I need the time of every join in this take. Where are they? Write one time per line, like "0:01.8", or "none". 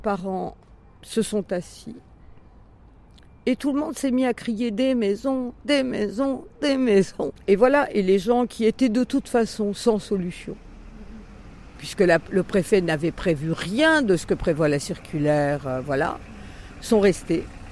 none

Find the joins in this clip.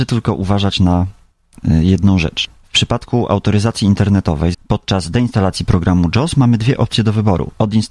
0:04.5

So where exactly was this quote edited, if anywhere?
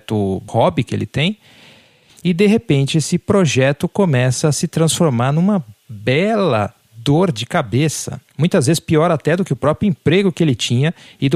none

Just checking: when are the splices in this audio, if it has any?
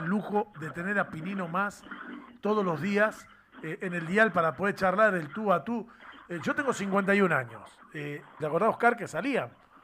0:08.4

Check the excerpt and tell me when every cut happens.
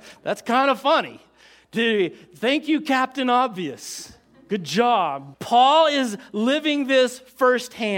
0:05.3

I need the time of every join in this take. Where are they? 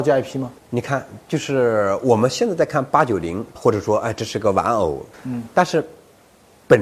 0:03.5

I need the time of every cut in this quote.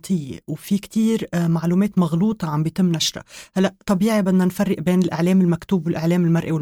none

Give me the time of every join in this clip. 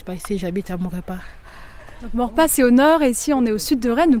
none

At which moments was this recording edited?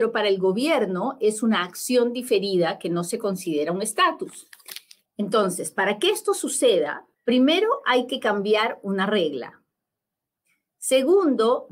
0:05.1
0:07.1

